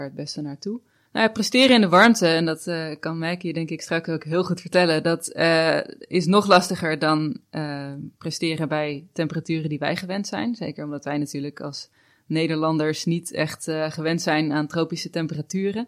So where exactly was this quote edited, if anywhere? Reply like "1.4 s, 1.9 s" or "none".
1.0 s